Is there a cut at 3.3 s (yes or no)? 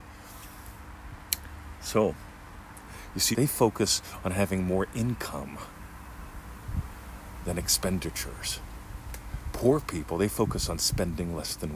yes